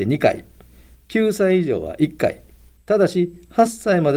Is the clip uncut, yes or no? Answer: yes